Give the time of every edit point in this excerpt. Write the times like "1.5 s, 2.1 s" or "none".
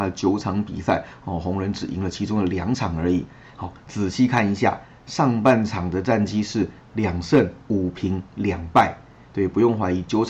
none